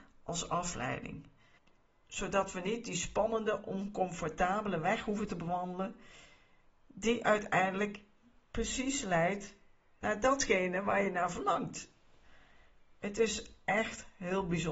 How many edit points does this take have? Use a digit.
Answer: 0